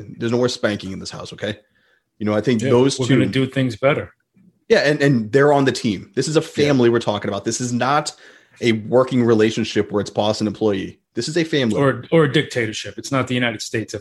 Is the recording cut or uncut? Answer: uncut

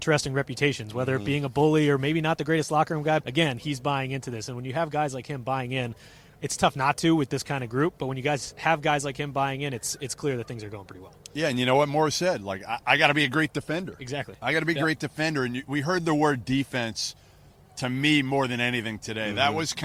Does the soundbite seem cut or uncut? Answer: cut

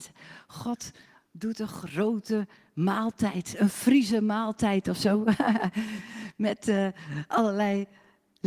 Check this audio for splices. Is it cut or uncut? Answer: uncut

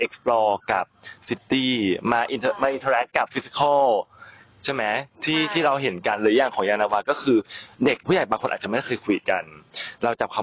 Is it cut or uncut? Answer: uncut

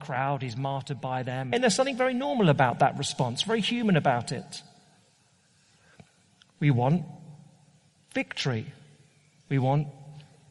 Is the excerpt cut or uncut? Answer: cut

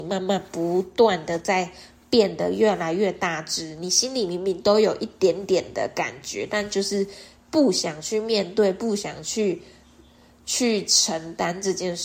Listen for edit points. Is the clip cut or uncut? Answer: uncut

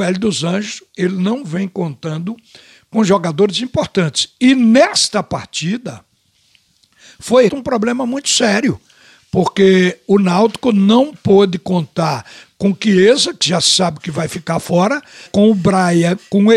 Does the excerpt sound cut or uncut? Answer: cut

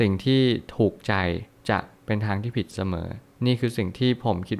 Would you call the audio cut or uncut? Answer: uncut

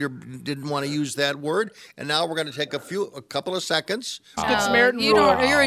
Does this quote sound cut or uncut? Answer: cut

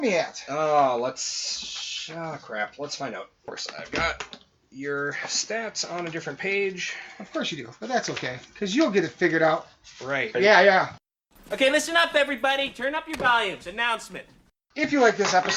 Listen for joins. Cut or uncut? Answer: cut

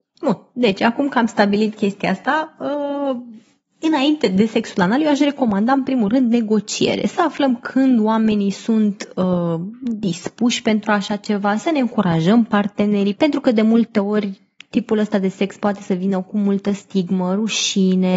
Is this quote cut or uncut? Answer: uncut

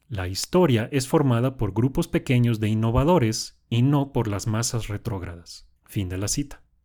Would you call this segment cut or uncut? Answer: cut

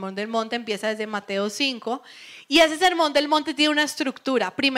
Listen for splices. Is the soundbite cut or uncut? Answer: uncut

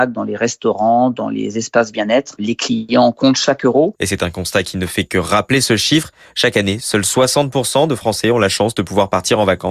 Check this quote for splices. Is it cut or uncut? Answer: uncut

